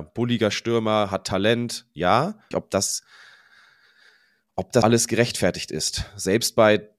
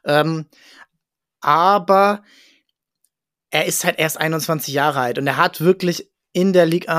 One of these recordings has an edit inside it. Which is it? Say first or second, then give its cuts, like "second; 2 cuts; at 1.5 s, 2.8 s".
first; 2 cuts; at 2.5 s, 4.8 s